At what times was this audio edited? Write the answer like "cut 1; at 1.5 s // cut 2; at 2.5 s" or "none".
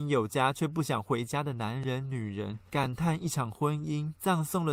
none